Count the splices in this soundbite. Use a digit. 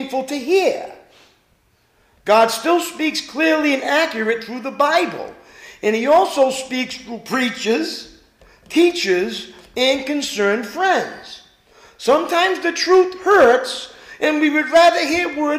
0